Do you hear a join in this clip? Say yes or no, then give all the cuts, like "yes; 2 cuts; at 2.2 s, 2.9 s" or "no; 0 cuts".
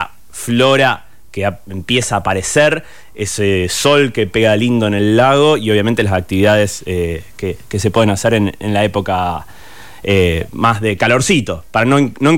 no; 0 cuts